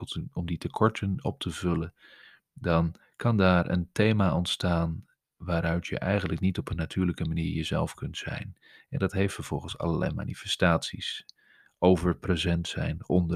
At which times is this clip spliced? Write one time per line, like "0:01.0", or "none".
none